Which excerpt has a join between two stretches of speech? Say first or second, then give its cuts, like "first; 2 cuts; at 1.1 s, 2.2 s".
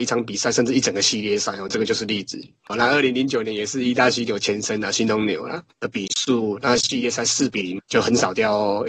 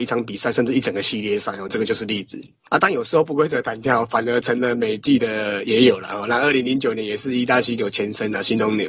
first; 3 cuts; at 2.7 s, 5.7 s, 7.8 s